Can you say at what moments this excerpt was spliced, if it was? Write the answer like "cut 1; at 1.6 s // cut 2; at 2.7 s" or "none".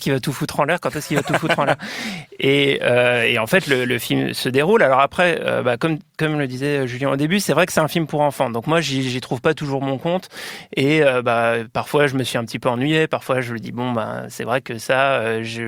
cut 1; at 3.9 s